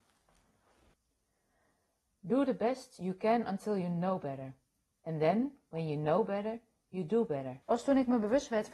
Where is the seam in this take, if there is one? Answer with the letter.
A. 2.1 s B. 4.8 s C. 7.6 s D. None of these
C